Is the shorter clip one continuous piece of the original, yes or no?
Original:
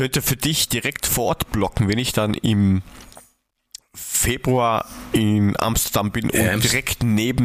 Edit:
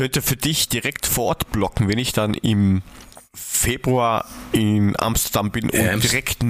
no